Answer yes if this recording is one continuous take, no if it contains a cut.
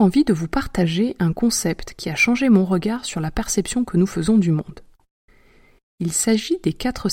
yes